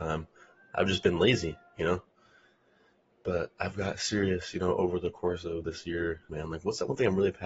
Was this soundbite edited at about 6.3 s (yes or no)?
yes